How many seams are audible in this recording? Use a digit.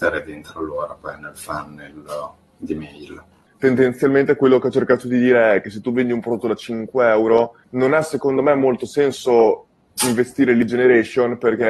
2